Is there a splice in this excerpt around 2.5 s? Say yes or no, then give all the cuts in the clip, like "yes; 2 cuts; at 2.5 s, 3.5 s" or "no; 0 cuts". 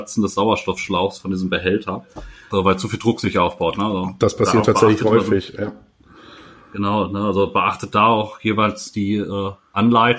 yes; 1 cut; at 2.5 s